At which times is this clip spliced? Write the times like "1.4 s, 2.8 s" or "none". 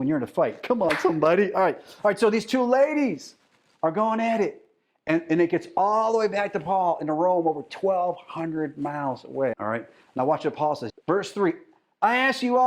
9.5 s, 10.9 s